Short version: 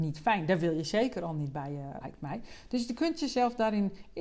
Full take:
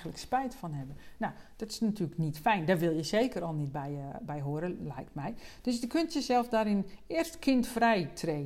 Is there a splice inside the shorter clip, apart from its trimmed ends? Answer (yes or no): yes